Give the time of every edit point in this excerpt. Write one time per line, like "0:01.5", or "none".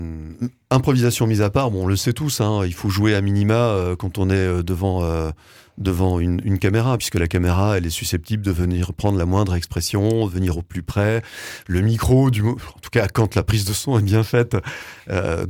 none